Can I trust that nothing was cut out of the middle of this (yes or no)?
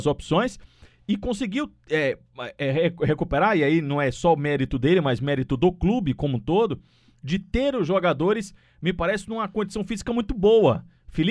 yes